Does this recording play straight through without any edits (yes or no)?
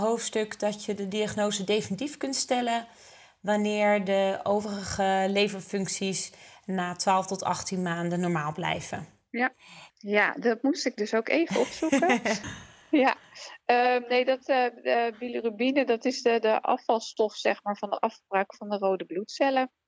no